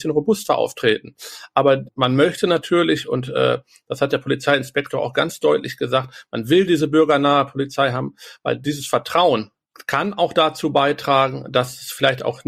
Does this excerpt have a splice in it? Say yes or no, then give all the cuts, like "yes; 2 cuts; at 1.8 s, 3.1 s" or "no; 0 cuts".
no; 0 cuts